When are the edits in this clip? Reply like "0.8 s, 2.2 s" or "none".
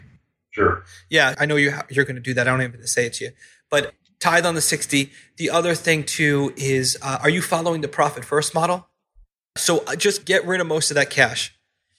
1.3 s, 9.6 s